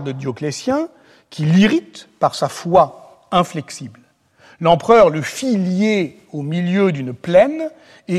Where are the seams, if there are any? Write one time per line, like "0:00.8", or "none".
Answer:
none